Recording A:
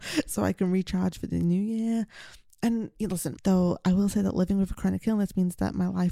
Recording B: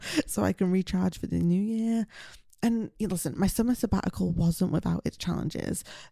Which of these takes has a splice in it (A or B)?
A